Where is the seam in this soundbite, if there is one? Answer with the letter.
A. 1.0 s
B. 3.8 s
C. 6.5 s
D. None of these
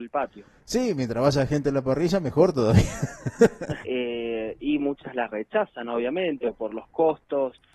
B